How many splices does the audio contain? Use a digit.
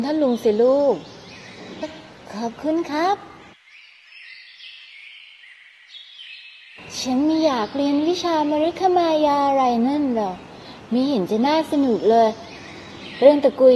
1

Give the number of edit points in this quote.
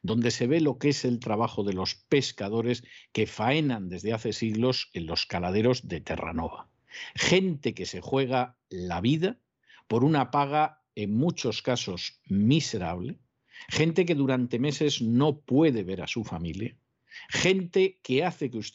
0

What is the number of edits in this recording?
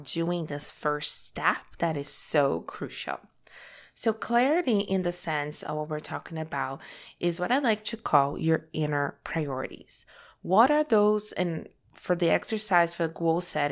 0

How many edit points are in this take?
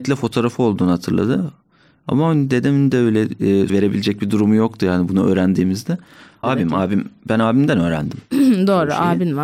2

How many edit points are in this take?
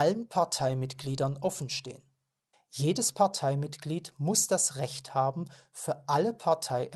1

